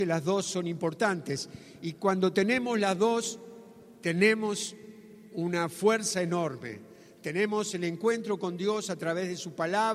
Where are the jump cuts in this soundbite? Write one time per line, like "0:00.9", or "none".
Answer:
none